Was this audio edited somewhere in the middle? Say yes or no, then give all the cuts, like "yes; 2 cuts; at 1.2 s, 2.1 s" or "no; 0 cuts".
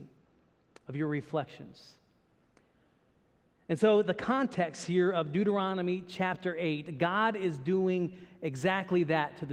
no; 0 cuts